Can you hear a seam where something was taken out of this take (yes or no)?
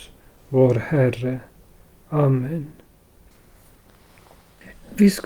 no